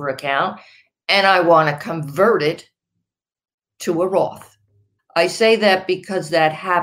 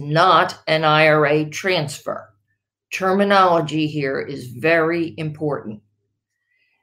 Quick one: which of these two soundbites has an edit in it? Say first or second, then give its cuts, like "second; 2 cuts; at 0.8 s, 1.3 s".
first; 1 cut; at 5.0 s